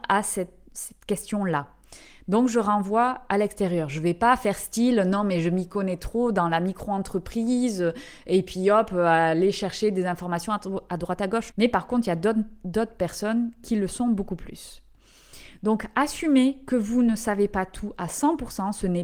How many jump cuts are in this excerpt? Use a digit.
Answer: 1